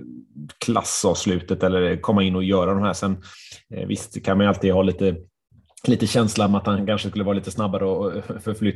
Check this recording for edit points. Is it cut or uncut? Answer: uncut